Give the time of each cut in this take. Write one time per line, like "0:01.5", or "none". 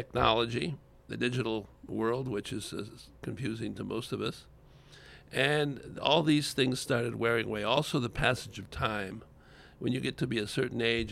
none